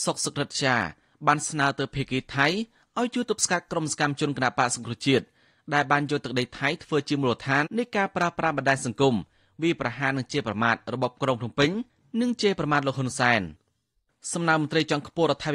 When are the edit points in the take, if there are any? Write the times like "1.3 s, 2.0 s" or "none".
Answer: 7.7 s